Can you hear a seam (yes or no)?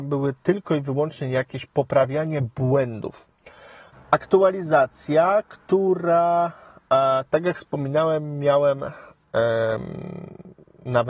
yes